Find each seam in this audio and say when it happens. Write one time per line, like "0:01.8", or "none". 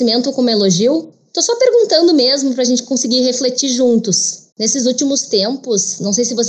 0:04.5